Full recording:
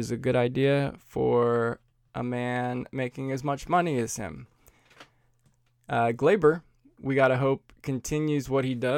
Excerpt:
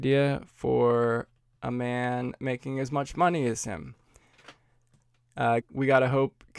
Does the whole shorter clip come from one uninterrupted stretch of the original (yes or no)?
no